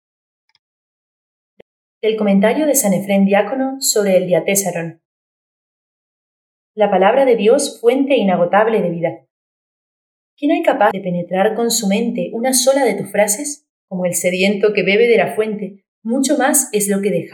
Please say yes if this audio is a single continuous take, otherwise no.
no